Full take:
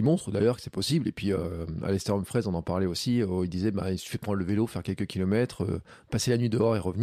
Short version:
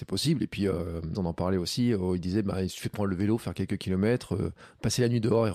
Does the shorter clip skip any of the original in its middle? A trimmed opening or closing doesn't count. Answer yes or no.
yes